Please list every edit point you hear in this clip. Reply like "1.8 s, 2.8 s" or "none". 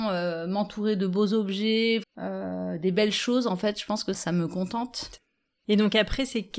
2.0 s